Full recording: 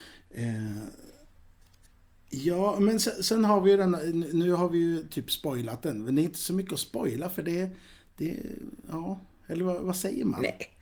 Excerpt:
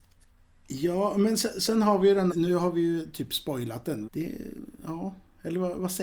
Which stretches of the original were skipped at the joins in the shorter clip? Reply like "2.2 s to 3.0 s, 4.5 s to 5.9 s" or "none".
3.9 s to 4.3 s, 6.0 s to 8.1 s